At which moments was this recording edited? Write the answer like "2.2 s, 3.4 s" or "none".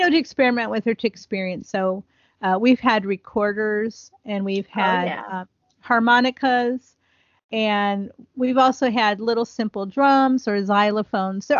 none